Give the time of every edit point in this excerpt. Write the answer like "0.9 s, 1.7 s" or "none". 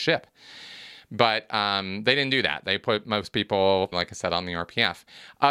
3.9 s